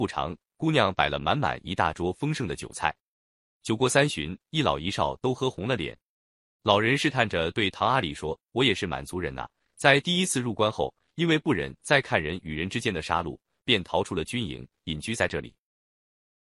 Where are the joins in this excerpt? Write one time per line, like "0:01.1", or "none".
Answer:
none